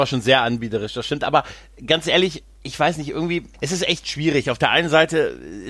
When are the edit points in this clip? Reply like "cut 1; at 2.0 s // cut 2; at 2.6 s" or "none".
cut 1; at 3.5 s